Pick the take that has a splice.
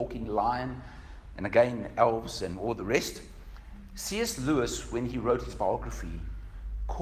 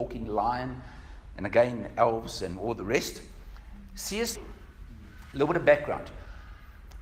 second; 1 cut; at 4.4 s

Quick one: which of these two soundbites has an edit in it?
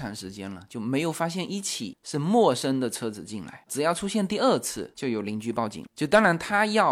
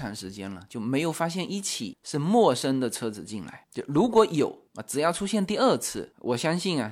first; 2 cuts; at 3.7 s, 4.9 s

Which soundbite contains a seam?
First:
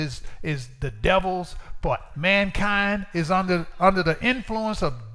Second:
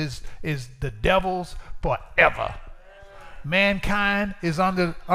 first; 1 cut; at 2.1 s

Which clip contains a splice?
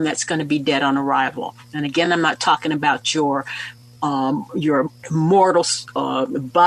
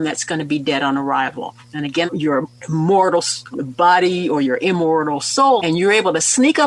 second; 3 cuts; at 2.1 s, 3.5 s, 5.6 s

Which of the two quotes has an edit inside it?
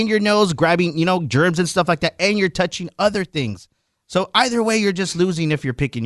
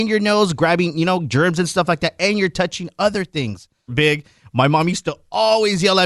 second; 1 cut; at 3.9 s

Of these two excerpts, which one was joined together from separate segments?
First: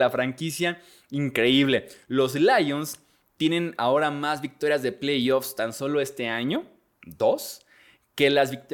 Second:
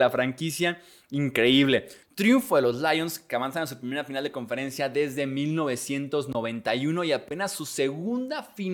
second; 1 cut; at 2.0 s

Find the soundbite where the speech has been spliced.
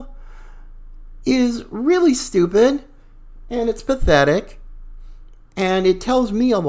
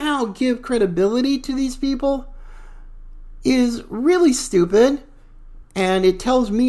second; 1 cut; at 5.6 s

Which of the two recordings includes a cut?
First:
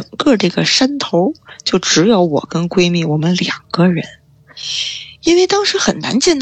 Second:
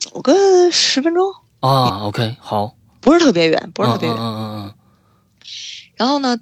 second; 1 cut; at 1.9 s

